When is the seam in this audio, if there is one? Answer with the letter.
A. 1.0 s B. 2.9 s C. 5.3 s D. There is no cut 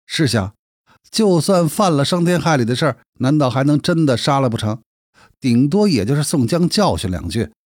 A